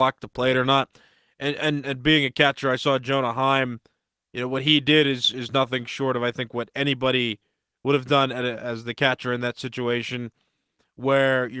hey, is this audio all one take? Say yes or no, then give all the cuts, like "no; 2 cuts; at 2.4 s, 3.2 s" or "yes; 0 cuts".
yes; 0 cuts